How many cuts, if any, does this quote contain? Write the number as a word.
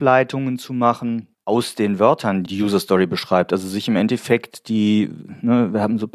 one